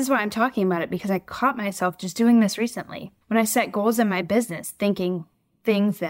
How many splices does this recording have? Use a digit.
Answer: 1